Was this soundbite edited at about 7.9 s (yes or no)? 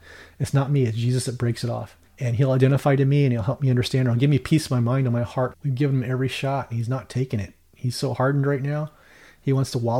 no